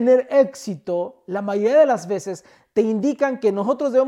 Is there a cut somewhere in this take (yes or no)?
no